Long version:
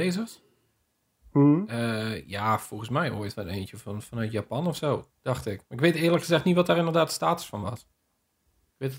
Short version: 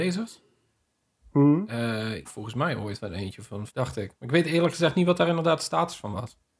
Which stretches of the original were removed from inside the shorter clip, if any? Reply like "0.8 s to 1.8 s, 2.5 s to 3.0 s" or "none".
2.2 s to 2.6 s, 4.0 s to 5.2 s